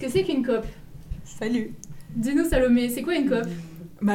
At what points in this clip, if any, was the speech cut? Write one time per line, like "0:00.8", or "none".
none